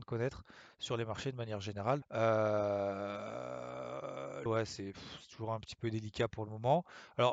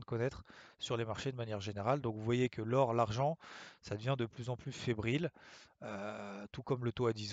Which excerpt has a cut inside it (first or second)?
first